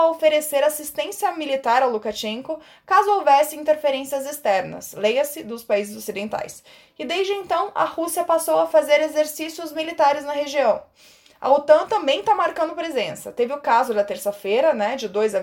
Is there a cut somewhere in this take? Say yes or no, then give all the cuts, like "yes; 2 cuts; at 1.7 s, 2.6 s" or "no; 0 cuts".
no; 0 cuts